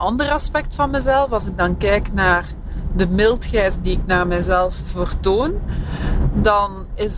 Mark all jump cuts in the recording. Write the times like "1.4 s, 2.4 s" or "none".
none